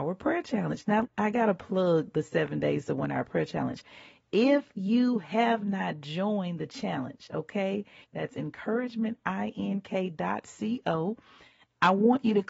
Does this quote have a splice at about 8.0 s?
yes; 2 cuts; at 1.0 s, 8.0 s

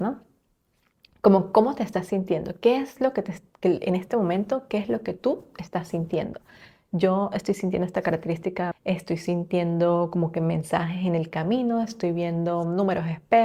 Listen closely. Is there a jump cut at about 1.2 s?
no; 1 cut; at 8.7 s

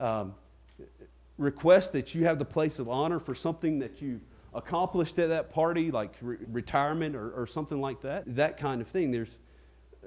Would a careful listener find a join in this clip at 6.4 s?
yes; 2 cuts; at 6.4 s, 8.2 s

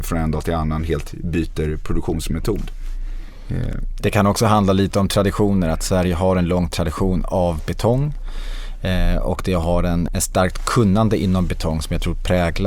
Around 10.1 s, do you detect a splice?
yes; 1 cut; at 10.1 s

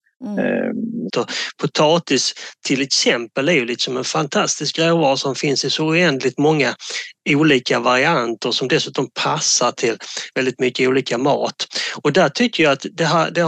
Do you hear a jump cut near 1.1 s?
yes; 1 cut; at 1.1 s

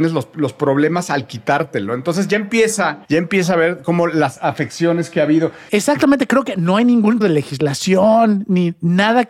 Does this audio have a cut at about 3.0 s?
yes; 3 cuts; at 3.0 s, 5.7 s, 7.2 s

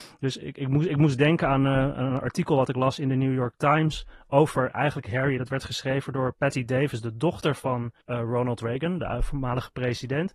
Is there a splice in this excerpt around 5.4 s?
no; 1 cut; at 8.0 s

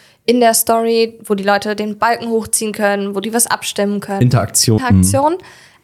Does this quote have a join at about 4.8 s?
yes; 1 cut; at 4.8 s

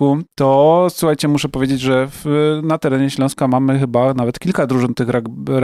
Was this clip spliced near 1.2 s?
no; 0 cuts

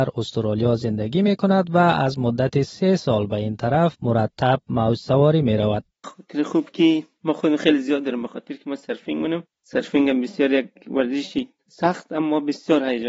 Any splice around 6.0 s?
yes; 1 cut; at 6.0 s

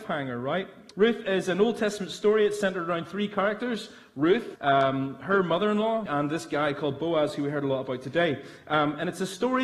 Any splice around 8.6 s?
no; 3 cuts; at 0.9 s, 4.6 s, 6.1 s

